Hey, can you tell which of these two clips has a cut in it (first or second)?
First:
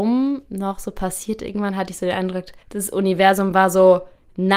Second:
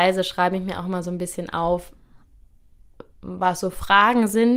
first